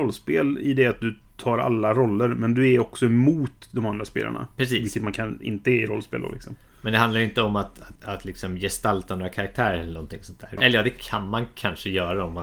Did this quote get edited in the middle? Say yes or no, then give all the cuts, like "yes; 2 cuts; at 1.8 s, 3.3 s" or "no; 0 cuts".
yes; 2 cuts; at 8.0 s, 10.6 s